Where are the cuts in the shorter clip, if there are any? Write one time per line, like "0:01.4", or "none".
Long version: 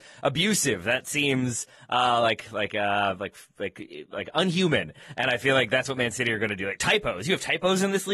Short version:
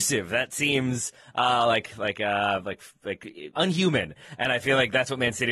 0:03.5